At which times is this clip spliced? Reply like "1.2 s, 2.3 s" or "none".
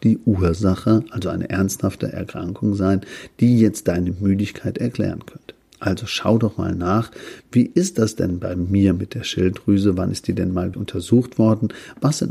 10.7 s